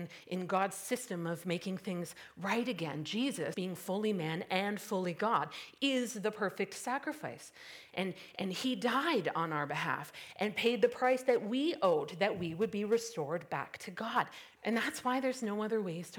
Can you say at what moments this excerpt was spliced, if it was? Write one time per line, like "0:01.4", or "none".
0:03.5
0:14.6